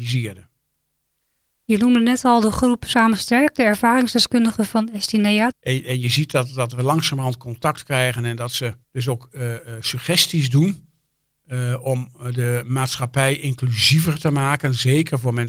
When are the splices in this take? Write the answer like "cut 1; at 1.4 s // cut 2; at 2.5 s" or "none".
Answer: cut 1; at 5.5 s // cut 2; at 8.8 s